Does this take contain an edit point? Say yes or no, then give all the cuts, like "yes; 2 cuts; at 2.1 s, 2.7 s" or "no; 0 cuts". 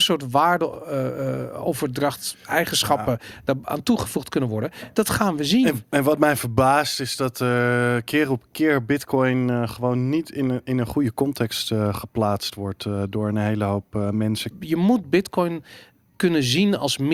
yes; 1 cut; at 14.5 s